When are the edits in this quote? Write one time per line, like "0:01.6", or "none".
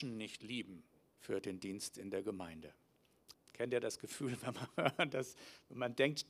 0:01.1
0:03.3